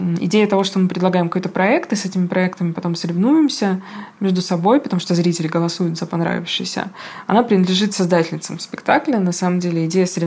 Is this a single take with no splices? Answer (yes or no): yes